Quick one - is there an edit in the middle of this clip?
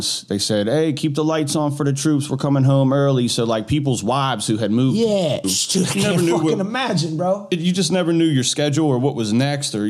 yes; 1 cut; at 5.4 s

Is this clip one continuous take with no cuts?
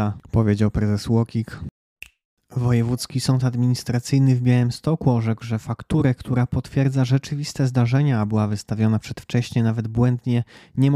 yes; 0 cuts

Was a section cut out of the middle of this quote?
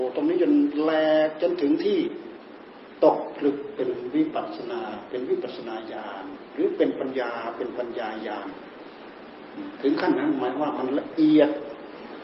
yes; 1 cut; at 7.1 s

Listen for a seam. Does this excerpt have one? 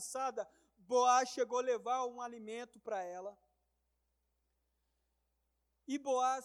no; 0 cuts

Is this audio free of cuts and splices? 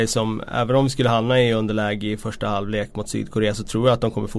yes; 0 cuts

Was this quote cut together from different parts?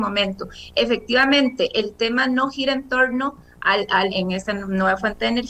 yes; 1 cut; at 4.1 s

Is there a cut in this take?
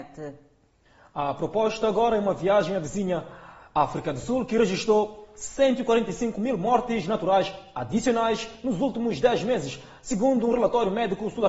no; 0 cuts

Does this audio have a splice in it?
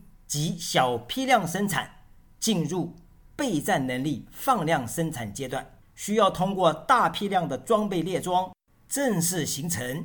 yes; 1 cut; at 5.8 s

